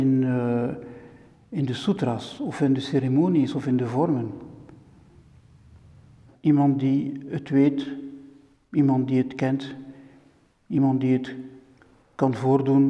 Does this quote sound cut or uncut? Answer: cut